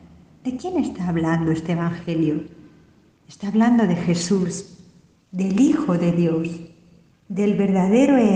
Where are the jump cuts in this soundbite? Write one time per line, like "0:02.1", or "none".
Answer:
none